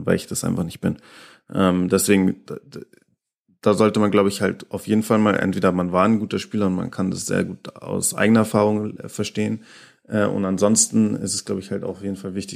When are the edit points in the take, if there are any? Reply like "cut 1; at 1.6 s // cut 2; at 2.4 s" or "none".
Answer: none